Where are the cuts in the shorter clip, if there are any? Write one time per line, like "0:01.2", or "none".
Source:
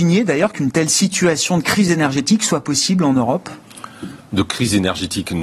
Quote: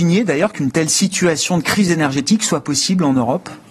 none